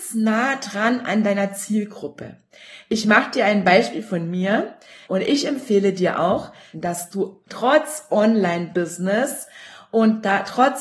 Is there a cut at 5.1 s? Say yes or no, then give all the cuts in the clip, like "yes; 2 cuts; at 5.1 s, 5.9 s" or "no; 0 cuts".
yes; 2 cuts; at 5.1 s, 6.7 s